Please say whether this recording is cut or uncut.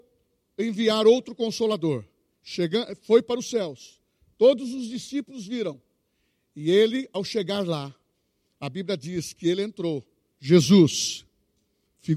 cut